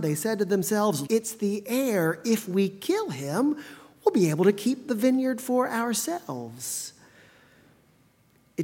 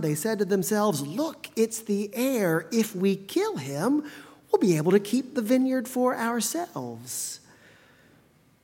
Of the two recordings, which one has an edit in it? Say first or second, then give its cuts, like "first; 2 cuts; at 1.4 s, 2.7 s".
first; 1 cut; at 1.1 s